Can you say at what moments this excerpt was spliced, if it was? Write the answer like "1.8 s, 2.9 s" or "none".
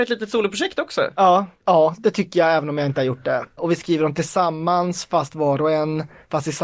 1.6 s, 3.6 s